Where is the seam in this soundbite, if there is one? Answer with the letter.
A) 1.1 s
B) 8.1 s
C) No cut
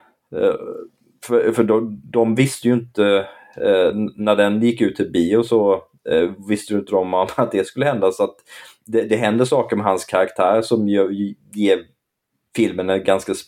C